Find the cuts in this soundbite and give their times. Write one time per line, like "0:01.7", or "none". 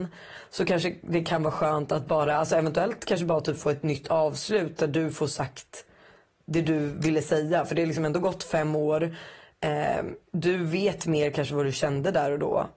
0:10.3